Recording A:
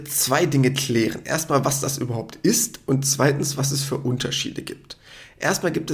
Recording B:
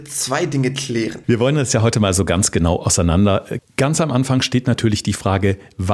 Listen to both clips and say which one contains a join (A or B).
B